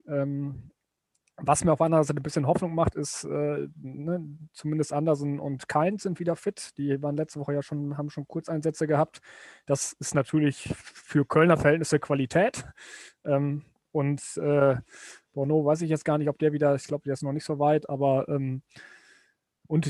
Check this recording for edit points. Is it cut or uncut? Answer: uncut